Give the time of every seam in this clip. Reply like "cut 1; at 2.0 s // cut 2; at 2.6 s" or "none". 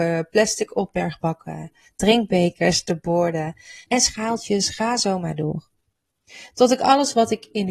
cut 1; at 3.8 s